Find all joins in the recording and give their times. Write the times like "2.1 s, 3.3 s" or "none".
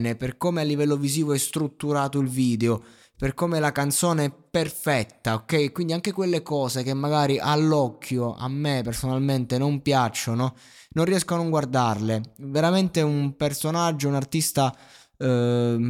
none